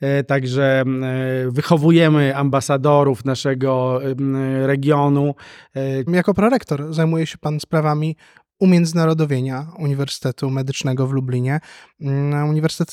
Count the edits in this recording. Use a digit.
1